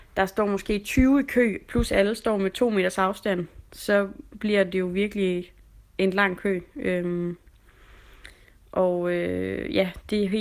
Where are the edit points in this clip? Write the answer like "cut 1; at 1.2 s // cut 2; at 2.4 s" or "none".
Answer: none

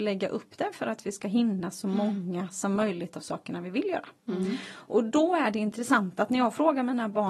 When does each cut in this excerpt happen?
none

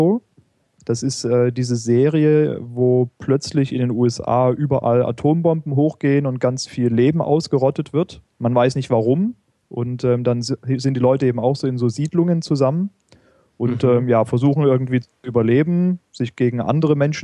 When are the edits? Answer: cut 1; at 8.3 s

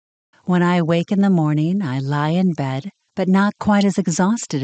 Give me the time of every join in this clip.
cut 1; at 3.1 s

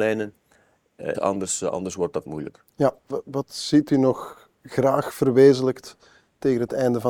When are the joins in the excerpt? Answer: cut 1; at 1.1 s // cut 2; at 3.1 s

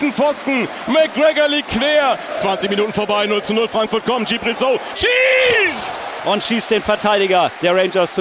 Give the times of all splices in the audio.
cut 1; at 4.9 s // cut 2; at 6.2 s

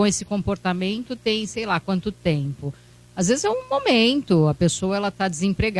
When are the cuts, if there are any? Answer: none

